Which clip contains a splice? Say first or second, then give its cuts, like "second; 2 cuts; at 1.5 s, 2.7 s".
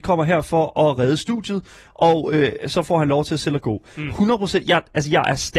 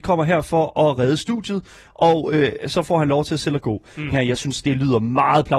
second; 1 cut; at 4.1 s